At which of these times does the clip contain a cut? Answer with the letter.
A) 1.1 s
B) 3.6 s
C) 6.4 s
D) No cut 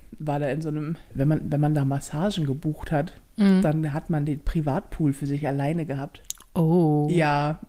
A